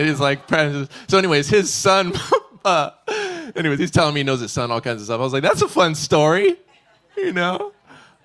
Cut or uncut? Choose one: uncut